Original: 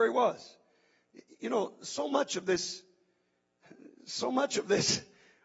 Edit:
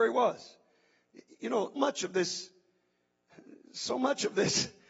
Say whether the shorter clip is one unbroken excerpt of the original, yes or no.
no